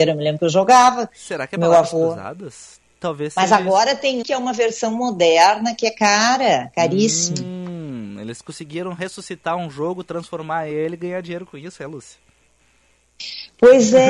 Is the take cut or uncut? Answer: cut